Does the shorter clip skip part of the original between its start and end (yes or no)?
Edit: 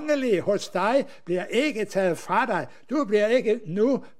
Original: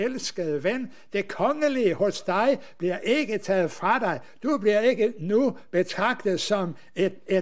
no